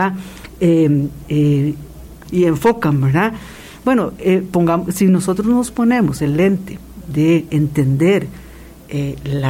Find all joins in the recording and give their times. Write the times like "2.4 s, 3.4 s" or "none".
2.2 s